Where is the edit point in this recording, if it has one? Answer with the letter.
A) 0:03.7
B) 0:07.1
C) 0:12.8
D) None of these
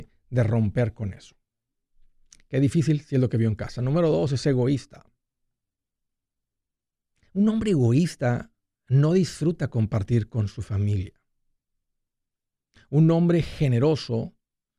D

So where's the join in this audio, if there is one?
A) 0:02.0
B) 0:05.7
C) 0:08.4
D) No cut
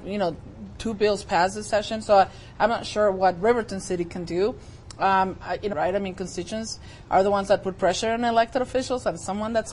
B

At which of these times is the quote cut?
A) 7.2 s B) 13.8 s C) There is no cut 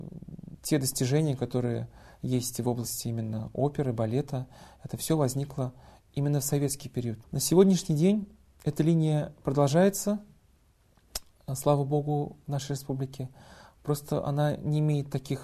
A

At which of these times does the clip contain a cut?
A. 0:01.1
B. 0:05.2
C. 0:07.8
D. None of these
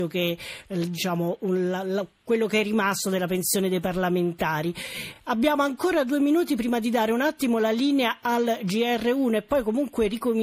D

